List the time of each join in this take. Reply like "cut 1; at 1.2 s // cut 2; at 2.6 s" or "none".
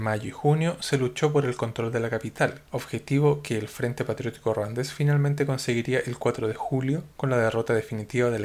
cut 1; at 2.6 s